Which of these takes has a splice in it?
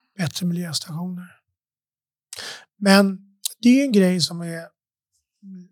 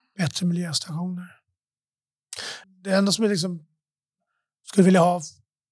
second; 1 cut; at 2.6 s

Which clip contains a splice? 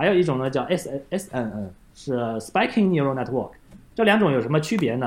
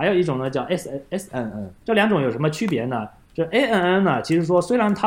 second; 1 cut; at 1.8 s

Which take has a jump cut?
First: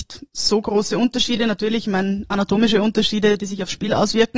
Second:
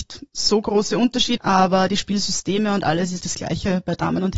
second; 2 cuts; at 1.4 s, 3.2 s

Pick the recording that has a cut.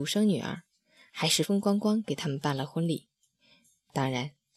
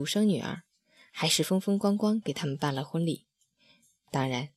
first; 1 cut; at 1.4 s

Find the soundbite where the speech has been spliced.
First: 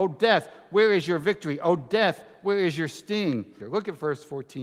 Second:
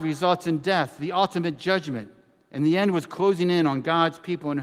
first; 1 cut; at 3.6 s

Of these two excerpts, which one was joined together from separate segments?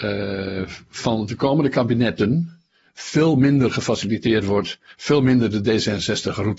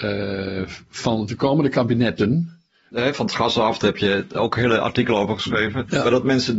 second; 1 cut; at 2.9 s

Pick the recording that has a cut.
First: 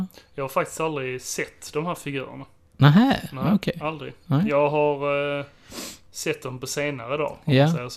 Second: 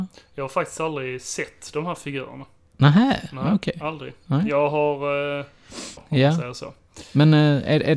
second; 1 cut; at 6.0 s

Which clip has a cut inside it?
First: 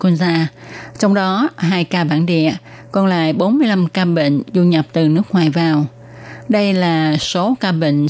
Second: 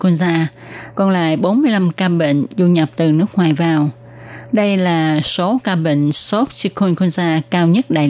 second; 1 cut; at 0.9 s

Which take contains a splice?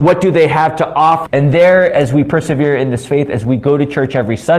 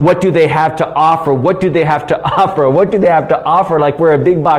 first; 1 cut; at 1.3 s

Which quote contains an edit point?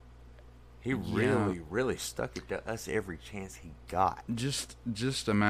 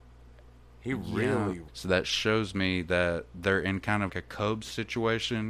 second; 2 cuts; at 1.7 s, 4.1 s

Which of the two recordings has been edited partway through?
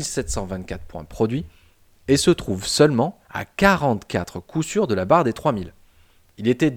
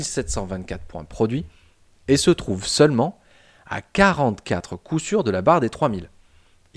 first; 1 cut; at 3.2 s

